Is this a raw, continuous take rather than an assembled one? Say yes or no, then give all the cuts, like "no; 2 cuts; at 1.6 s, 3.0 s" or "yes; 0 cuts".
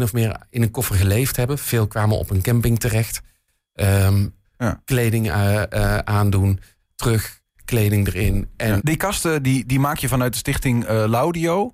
no; 3 cuts; at 4.4 s, 6.8 s, 8.8 s